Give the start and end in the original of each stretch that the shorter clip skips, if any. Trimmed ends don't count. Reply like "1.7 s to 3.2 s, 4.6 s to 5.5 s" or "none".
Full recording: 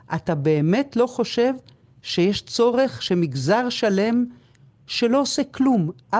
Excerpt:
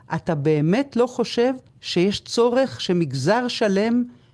1.7 s to 1.9 s